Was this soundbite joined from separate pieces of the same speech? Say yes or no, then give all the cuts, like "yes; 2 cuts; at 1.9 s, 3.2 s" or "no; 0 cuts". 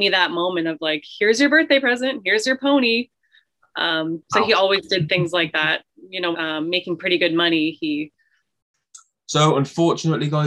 yes; 1 cut; at 6.3 s